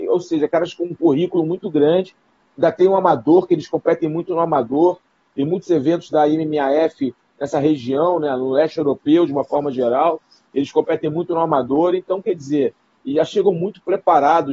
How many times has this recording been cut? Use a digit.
0